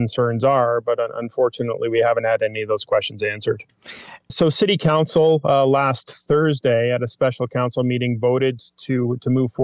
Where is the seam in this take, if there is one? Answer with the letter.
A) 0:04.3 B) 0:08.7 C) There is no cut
A